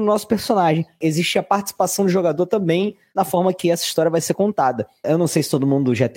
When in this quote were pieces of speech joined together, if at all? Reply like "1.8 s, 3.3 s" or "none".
1.0 s, 5.0 s